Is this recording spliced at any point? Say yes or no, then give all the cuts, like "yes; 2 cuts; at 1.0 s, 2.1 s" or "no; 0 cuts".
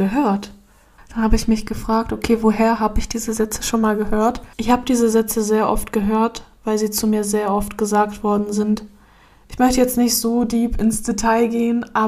yes; 1 cut; at 4.5 s